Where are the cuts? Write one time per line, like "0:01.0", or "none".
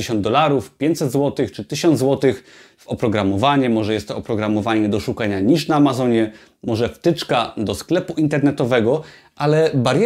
none